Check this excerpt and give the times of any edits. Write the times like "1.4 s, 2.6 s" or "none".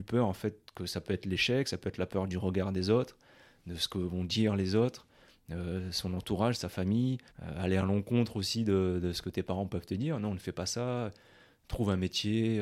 7.3 s